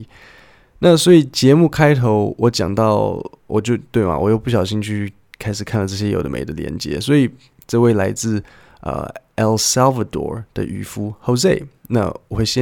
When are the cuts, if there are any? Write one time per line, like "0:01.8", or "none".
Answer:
none